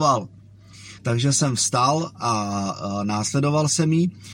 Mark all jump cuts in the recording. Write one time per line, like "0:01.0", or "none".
0:01.0